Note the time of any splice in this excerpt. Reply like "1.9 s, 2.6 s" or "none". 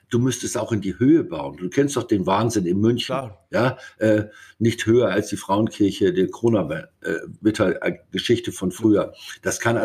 none